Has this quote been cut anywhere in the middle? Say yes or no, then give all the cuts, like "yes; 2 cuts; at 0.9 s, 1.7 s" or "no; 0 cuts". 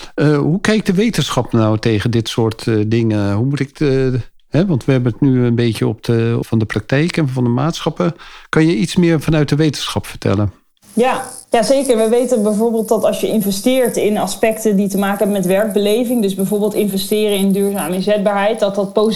yes; 1 cut; at 6.4 s